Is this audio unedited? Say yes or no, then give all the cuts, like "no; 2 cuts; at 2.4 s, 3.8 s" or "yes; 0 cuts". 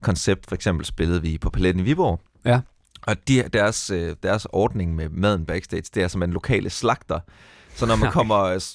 yes; 0 cuts